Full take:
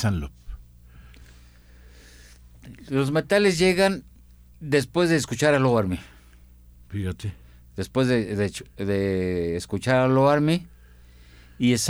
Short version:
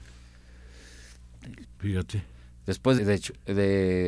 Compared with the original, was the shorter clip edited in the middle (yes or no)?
yes